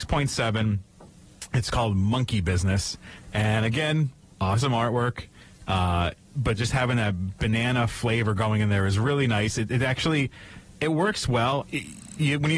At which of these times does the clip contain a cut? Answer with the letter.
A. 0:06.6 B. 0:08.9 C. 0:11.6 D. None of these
C